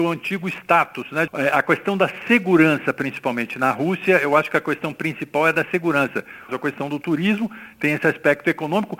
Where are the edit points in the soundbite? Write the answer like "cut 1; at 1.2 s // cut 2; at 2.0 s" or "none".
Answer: cut 1; at 1.3 s // cut 2; at 6.5 s

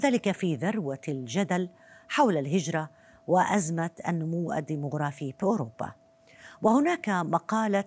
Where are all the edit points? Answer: none

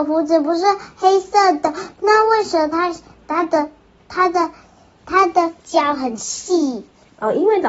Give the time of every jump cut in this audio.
none

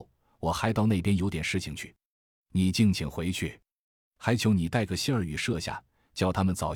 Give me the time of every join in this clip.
none

